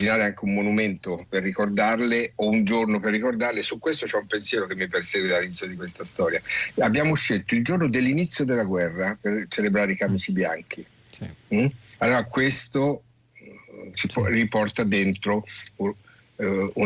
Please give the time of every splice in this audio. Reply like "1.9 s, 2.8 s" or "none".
12.0 s, 13.9 s